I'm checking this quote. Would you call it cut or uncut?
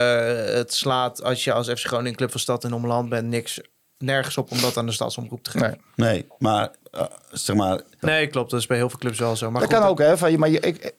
cut